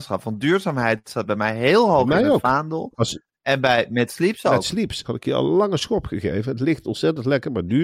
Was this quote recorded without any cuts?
no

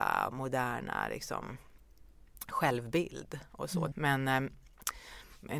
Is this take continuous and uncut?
no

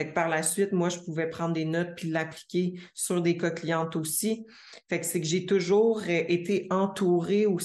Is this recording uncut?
yes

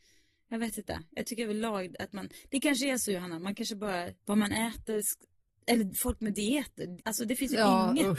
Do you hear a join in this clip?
yes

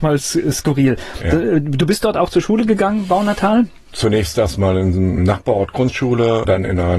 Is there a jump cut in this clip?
no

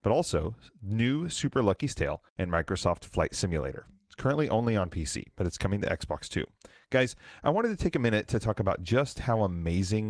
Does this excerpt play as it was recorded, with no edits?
no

